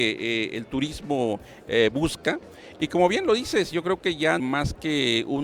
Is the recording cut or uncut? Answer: cut